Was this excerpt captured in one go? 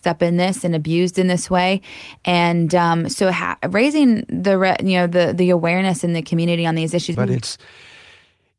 no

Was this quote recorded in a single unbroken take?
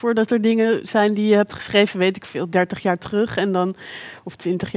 yes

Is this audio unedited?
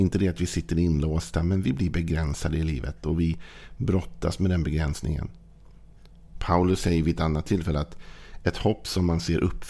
no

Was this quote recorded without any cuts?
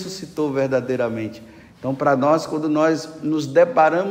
no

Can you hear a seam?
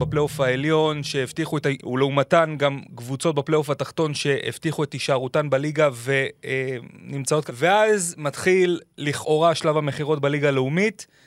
yes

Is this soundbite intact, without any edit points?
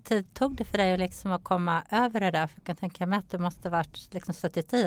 yes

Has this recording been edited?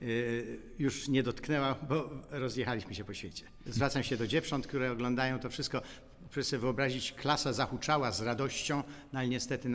yes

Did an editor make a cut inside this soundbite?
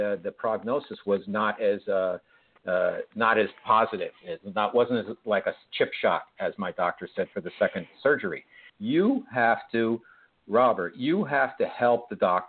yes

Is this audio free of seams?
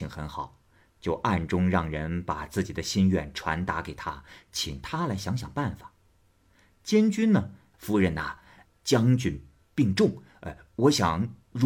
no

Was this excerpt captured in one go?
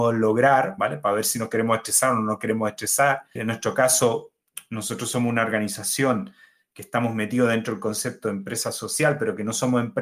no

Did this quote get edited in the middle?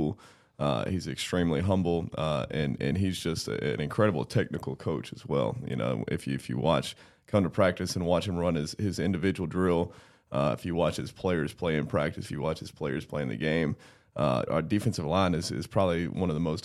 yes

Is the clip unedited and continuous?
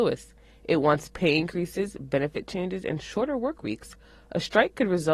yes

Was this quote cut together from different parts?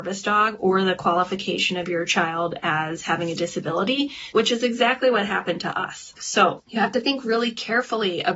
yes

